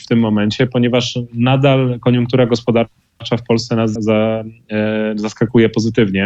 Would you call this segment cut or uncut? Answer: cut